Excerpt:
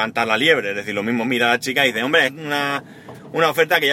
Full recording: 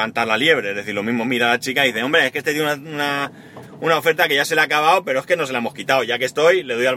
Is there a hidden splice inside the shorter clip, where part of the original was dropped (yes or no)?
yes